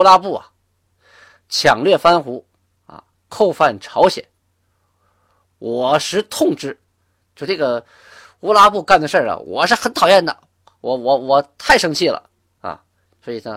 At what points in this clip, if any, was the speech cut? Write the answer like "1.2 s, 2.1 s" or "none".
none